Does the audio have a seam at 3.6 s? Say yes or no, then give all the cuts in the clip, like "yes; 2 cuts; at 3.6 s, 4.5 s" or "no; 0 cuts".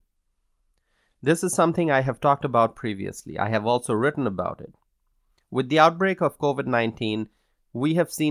no; 0 cuts